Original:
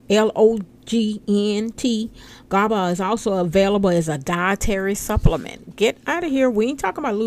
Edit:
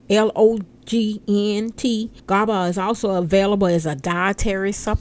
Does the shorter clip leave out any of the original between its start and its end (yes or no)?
yes